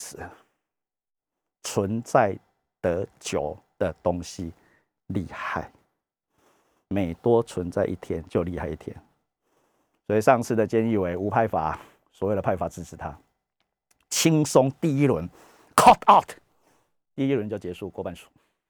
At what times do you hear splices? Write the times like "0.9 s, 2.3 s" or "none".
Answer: none